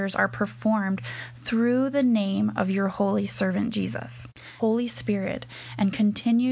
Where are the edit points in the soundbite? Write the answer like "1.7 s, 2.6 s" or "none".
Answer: 4.6 s